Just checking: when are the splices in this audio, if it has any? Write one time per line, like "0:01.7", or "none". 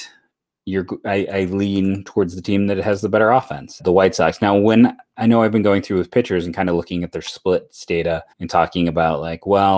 0:03.8
0:08.3